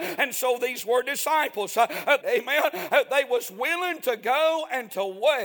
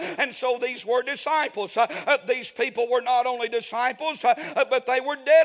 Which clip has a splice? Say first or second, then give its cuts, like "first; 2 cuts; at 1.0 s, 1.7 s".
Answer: first; 1 cut; at 2.2 s